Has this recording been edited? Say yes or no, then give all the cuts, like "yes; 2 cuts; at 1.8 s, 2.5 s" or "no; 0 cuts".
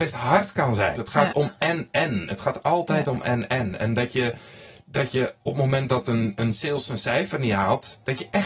yes; 1 cut; at 1.0 s